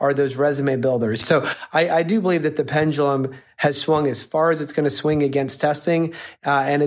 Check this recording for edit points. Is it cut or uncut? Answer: cut